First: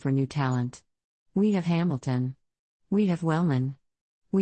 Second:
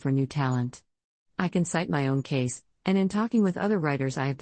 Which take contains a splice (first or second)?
first